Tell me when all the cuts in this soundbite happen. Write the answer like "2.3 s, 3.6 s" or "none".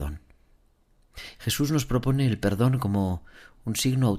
1.4 s